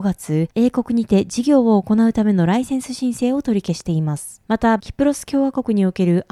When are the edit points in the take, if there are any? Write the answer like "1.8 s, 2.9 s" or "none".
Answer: 4.8 s